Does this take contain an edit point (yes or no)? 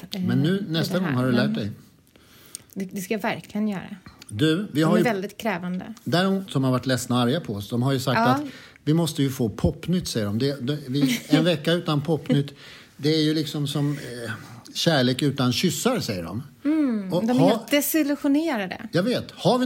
yes